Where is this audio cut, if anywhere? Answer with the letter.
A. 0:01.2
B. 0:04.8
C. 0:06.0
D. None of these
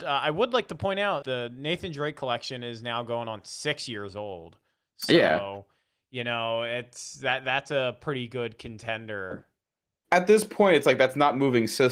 A